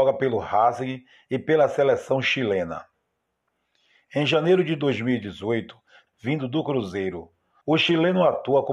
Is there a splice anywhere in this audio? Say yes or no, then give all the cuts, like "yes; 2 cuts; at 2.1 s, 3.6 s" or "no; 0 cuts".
yes; 2 cuts; at 6.1 s, 7.6 s